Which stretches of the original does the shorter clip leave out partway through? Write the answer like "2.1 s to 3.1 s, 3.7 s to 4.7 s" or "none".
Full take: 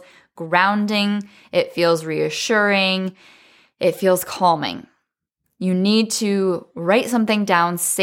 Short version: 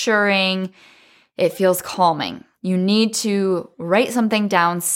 5.0 s to 5.5 s